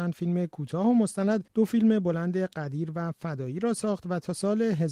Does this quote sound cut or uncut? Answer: cut